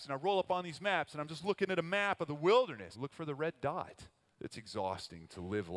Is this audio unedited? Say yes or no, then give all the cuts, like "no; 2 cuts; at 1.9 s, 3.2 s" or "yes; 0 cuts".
no; 2 cuts; at 2.9 s, 4.3 s